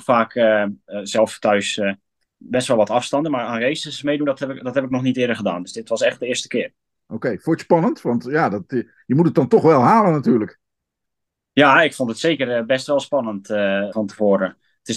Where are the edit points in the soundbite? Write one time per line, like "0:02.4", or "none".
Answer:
0:13.9